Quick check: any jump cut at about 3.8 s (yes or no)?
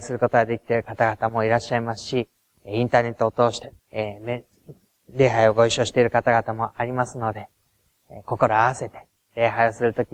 yes